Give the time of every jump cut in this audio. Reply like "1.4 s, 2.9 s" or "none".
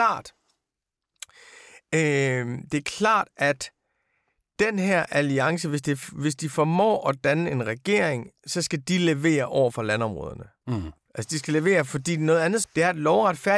11.1 s, 12.6 s

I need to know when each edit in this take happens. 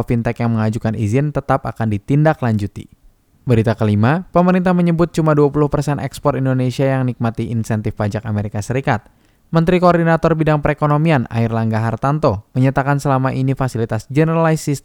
none

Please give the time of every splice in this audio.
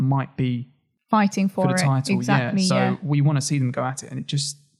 none

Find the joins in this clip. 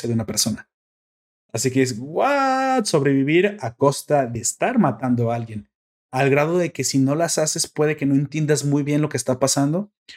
6.0 s

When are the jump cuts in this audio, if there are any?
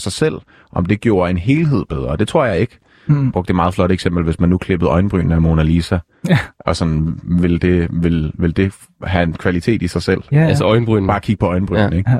none

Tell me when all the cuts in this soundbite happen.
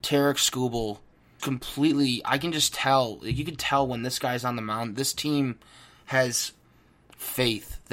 1.4 s

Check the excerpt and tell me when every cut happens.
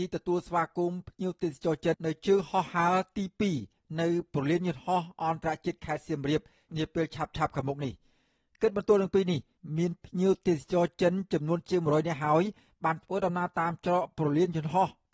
1.9 s

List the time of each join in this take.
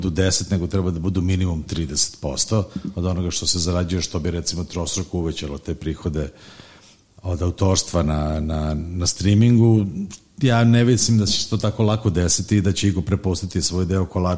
none

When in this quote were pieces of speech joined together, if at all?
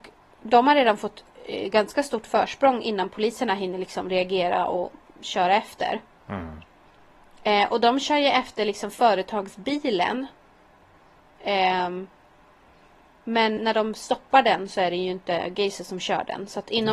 13.6 s

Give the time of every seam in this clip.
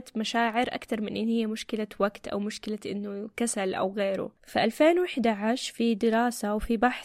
4.4 s

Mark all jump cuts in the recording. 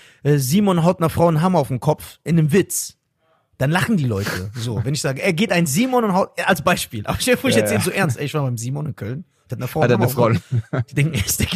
none

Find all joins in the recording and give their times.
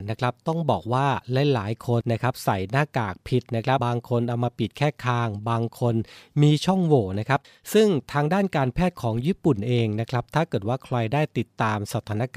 2.0 s, 3.8 s

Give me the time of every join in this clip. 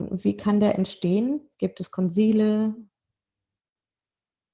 1.5 s

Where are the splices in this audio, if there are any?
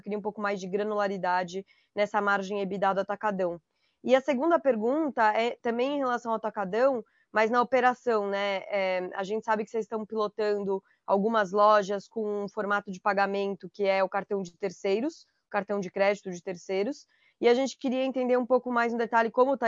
none

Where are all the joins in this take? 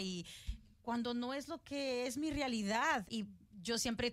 3.1 s

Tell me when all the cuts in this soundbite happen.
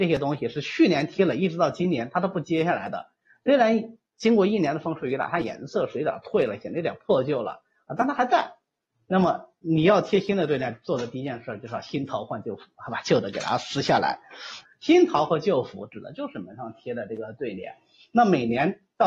14.6 s

